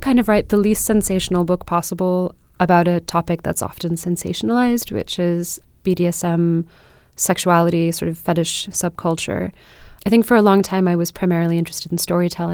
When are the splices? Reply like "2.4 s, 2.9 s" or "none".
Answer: 10.0 s